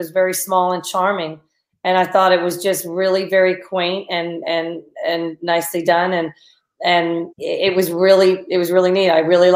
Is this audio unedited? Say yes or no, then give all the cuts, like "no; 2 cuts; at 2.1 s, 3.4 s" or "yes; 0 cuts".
no; 1 cut; at 7.3 s